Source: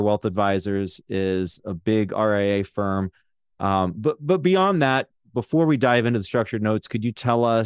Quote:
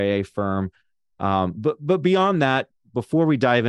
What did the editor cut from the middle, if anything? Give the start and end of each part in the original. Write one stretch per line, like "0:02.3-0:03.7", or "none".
none